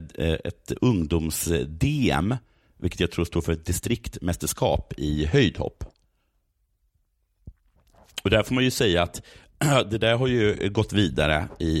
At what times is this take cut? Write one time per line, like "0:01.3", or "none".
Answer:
none